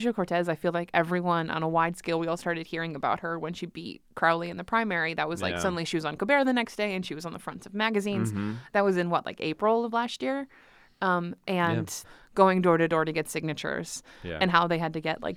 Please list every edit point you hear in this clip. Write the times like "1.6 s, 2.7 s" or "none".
12.0 s